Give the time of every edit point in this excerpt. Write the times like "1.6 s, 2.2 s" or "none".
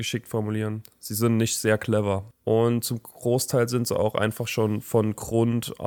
2.3 s